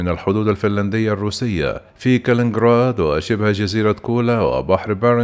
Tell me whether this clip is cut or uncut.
cut